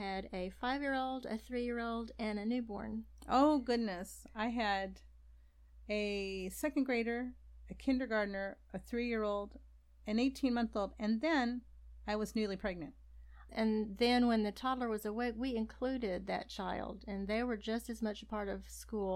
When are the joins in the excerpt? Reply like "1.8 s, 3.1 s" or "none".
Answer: 13.5 s